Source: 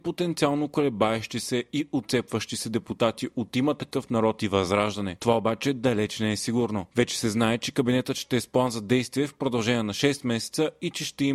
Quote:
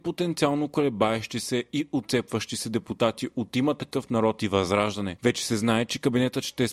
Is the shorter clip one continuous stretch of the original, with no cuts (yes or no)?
no